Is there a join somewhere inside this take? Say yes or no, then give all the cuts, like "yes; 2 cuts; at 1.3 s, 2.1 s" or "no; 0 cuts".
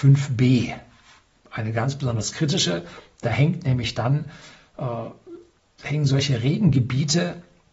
no; 0 cuts